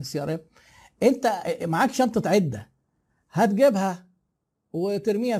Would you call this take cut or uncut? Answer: uncut